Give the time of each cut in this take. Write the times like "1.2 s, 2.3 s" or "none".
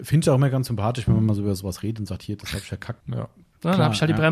3.0 s